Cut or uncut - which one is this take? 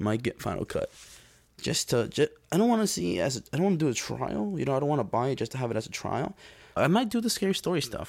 cut